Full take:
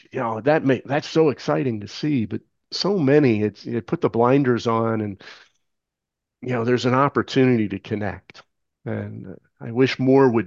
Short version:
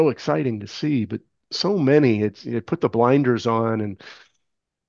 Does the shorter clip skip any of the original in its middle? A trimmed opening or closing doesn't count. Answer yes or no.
no